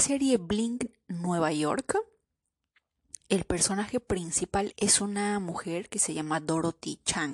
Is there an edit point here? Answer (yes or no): yes